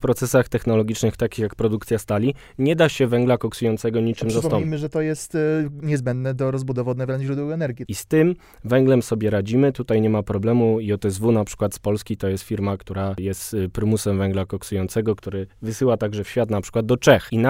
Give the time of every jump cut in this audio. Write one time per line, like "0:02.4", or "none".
0:07.9